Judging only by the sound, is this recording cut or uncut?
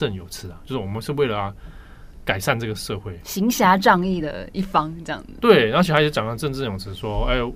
uncut